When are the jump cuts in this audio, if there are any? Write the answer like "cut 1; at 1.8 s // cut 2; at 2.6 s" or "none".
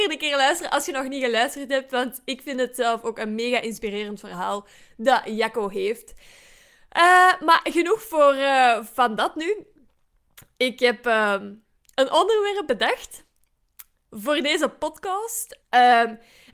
cut 1; at 15.6 s